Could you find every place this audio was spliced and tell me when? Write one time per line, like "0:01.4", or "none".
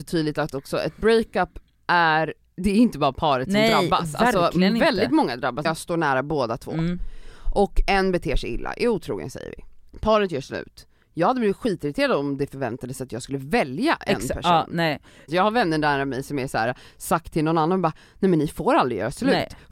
0:05.6
0:09.9
0:15.3